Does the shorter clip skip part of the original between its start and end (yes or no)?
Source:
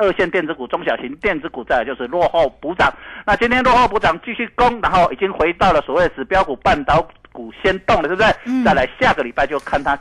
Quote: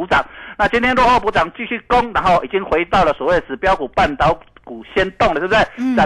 no